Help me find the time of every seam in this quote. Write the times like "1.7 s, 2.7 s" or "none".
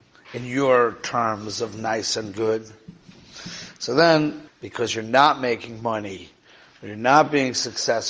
4.5 s